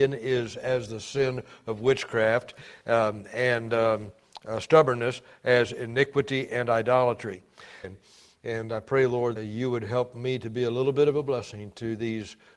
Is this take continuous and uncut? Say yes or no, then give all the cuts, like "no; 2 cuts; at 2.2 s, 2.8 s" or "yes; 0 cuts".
no; 2 cuts; at 7.8 s, 9.4 s